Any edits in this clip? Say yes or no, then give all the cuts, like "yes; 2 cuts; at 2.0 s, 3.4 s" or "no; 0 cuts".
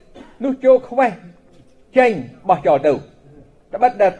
no; 0 cuts